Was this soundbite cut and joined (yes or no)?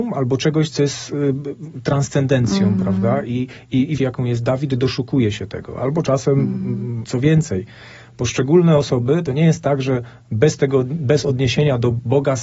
yes